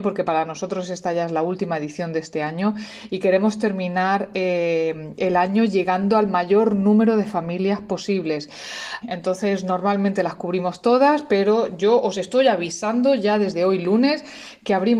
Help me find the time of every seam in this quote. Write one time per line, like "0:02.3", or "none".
0:09.0